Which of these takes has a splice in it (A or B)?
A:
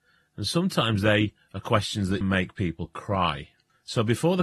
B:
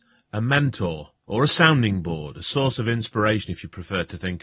A